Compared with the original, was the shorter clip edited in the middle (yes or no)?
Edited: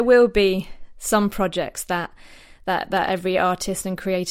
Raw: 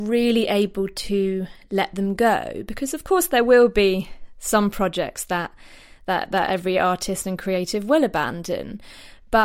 no